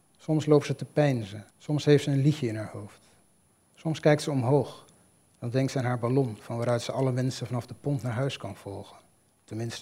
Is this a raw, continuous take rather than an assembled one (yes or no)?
no